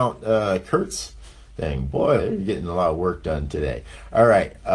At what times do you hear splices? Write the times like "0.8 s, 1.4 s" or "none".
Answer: 2.2 s